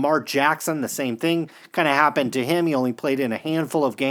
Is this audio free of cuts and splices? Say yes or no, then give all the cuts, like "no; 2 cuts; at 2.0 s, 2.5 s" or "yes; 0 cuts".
yes; 0 cuts